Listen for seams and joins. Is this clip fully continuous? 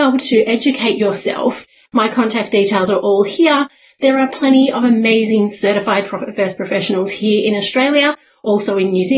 no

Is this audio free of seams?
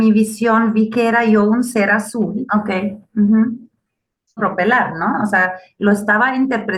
no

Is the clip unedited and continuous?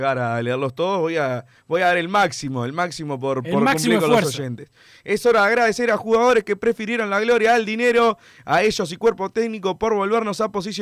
yes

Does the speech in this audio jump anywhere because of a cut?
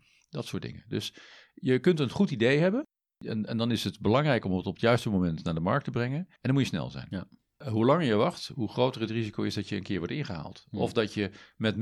yes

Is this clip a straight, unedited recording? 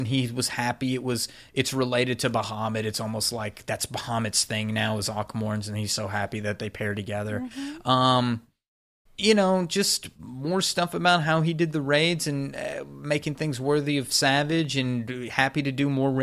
yes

